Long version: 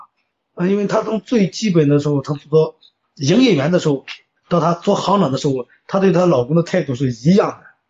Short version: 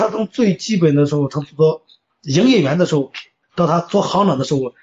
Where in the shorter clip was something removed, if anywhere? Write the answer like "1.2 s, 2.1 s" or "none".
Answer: none